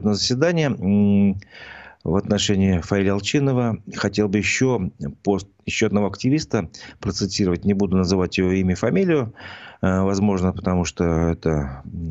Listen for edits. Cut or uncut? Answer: uncut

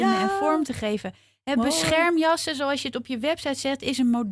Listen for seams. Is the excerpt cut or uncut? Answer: uncut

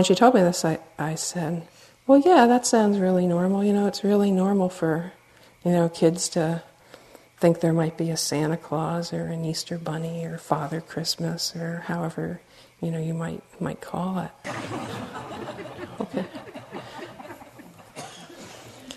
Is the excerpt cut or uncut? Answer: cut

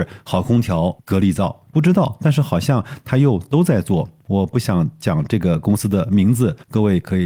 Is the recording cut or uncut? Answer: cut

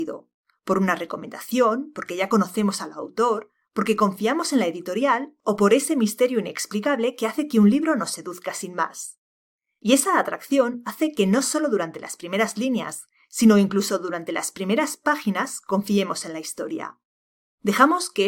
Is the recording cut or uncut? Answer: uncut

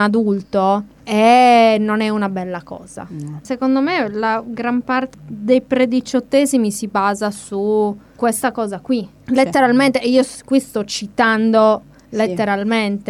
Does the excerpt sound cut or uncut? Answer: cut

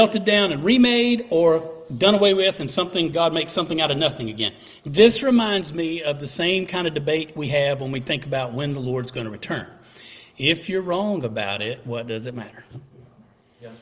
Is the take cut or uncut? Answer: cut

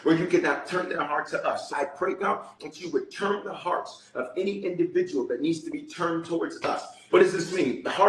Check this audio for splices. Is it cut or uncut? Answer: cut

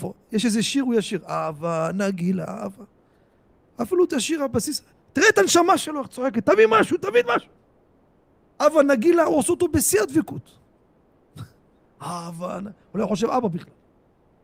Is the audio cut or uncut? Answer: uncut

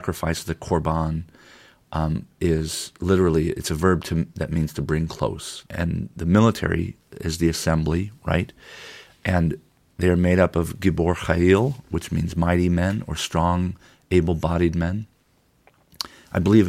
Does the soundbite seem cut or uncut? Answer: cut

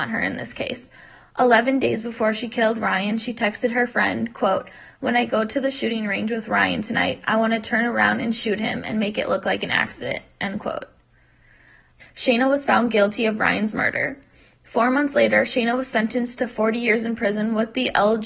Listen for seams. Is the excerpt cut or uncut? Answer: cut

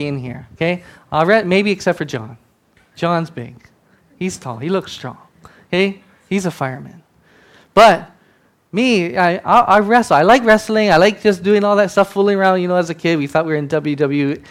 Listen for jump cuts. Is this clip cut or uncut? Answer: uncut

